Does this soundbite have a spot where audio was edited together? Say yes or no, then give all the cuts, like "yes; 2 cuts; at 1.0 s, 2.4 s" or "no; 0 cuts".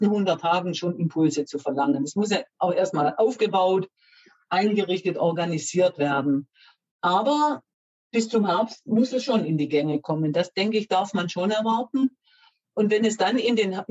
no; 0 cuts